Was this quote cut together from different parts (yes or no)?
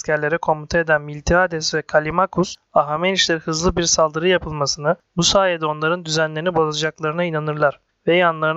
no